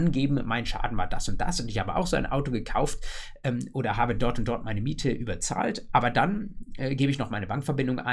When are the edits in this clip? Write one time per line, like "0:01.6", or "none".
none